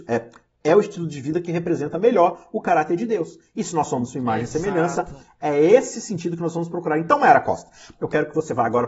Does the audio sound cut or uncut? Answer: cut